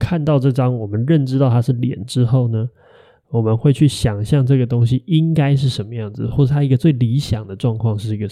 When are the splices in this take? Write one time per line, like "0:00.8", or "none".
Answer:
none